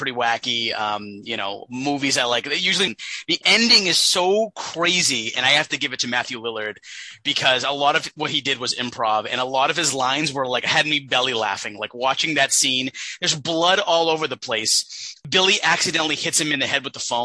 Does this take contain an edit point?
yes; 1 cut; at 2.9 s

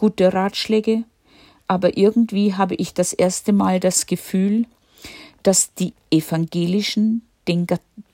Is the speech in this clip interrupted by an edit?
no; 0 cuts

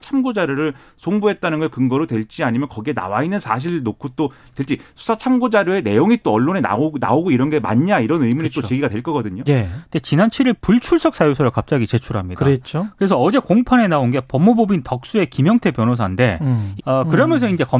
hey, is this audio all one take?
no; 2 cuts; at 9.5 s, 16.8 s

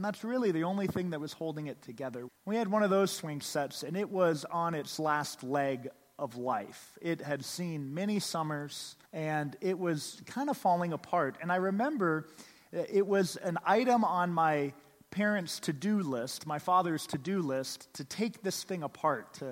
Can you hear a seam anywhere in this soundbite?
yes; 2 cuts; at 2.3 s, 9.1 s

